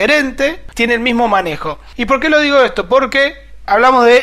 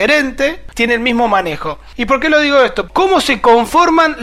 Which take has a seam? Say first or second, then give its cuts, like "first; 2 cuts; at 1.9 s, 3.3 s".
second; 1 cut; at 2.9 s